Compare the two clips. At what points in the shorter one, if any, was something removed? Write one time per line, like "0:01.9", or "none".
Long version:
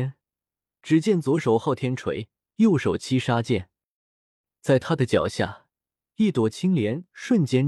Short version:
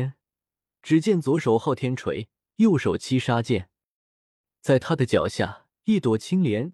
0:05.8